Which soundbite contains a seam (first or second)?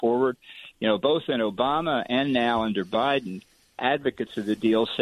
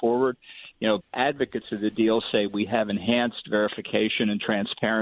second